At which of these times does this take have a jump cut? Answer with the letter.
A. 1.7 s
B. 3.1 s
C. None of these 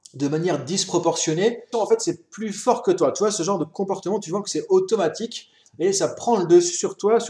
A